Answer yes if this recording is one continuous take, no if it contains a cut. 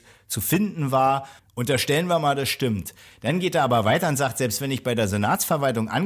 no